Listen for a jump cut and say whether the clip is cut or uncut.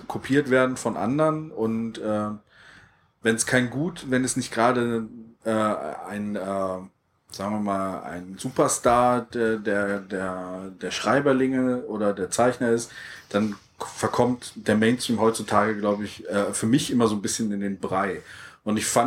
uncut